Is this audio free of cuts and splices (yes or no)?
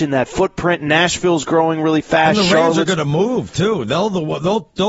yes